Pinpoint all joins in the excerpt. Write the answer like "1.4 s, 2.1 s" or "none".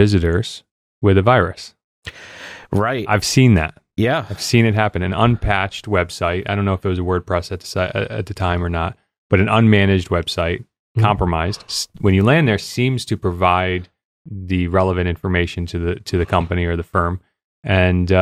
none